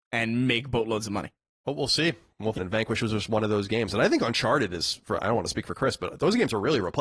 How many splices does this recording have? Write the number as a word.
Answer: one